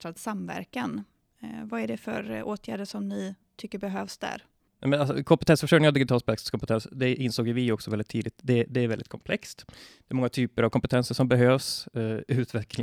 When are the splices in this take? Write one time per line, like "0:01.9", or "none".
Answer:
none

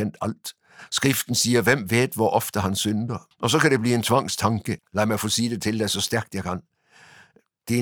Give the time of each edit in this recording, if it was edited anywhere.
0:03.3
0:04.8

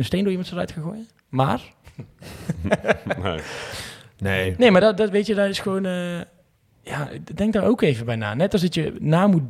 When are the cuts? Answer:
none

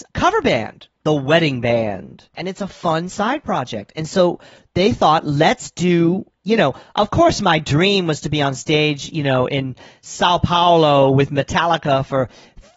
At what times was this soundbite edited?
0:02.3

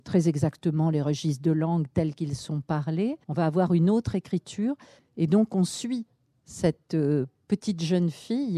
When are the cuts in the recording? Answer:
0:03.2
0:05.0

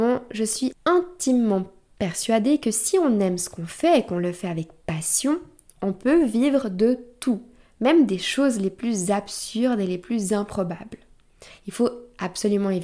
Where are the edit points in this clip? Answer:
0:11.5

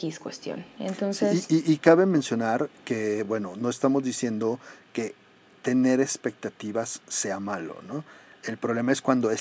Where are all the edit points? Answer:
none

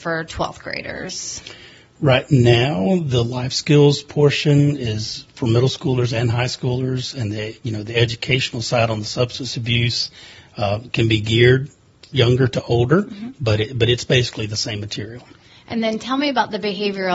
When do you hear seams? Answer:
none

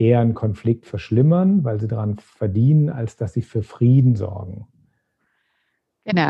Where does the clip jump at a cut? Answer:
none

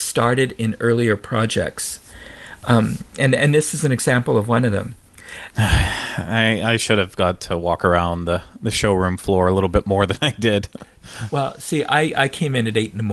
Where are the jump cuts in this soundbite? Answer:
0:05.5

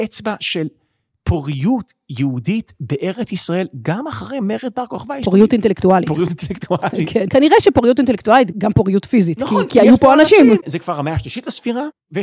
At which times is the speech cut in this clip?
0:10.6

